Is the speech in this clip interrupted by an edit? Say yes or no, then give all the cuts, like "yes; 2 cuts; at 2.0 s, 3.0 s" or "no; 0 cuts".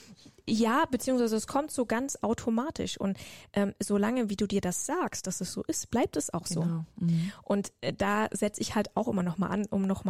no; 0 cuts